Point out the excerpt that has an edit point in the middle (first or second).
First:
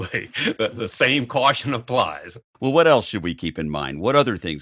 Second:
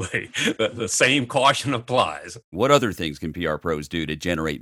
second